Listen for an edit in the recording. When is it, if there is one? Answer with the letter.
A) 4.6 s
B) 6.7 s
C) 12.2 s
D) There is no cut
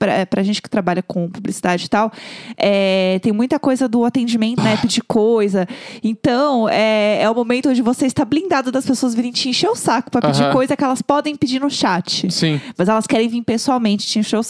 A